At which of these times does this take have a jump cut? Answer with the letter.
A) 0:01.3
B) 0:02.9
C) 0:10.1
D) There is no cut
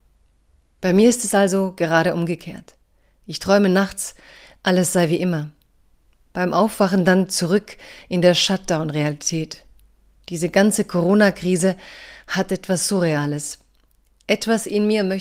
D